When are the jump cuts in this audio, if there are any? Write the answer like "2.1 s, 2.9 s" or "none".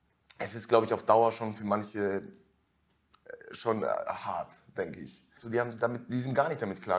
5.4 s

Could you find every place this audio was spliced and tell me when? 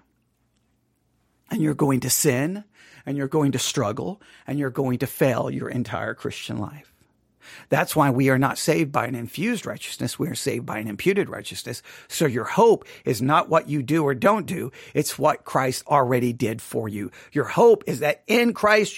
none

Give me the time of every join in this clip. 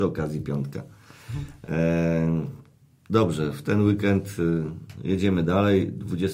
none

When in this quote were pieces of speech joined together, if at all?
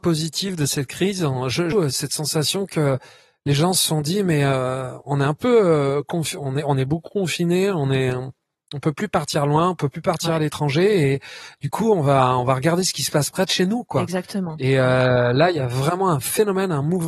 1.7 s

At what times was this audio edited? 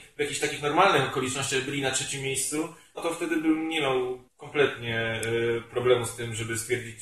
3.0 s, 4.3 s

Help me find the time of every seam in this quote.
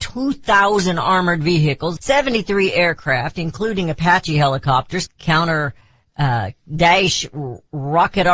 2.0 s, 5.1 s

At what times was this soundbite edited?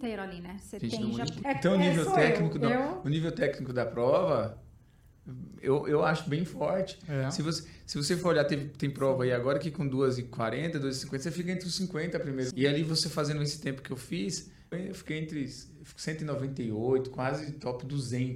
1.4 s, 12.5 s, 14.7 s

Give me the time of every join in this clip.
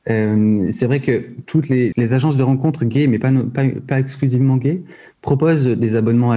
1.9 s

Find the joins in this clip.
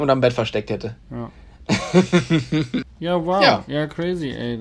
2.8 s

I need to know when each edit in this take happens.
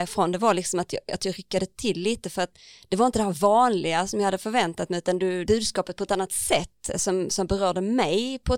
5.5 s

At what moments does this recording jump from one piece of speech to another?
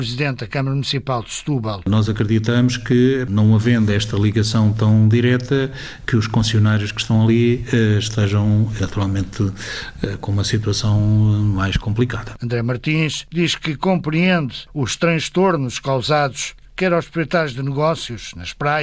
8.8 s, 16.6 s

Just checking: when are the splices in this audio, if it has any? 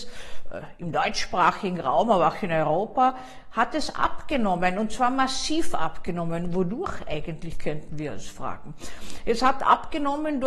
none

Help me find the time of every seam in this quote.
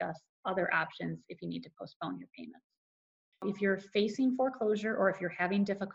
3.3 s

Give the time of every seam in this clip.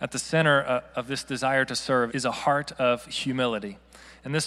2.1 s

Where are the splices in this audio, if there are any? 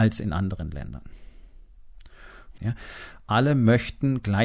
2.6 s

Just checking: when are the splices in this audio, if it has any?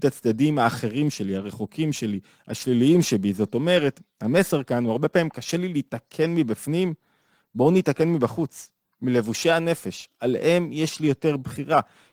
none

